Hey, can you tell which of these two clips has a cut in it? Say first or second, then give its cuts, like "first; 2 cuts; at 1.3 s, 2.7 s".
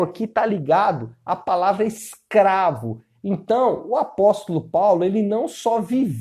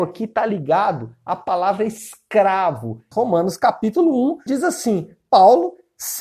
second; 2 cuts; at 3.1 s, 4.5 s